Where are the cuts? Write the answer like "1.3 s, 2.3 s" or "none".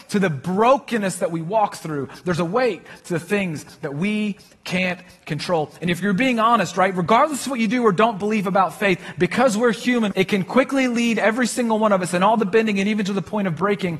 10.1 s